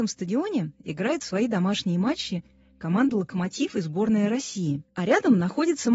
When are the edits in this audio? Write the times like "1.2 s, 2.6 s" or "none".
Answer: none